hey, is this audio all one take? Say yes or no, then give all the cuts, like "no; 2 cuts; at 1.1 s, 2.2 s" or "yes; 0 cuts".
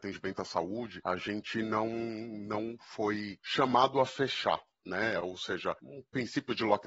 yes; 0 cuts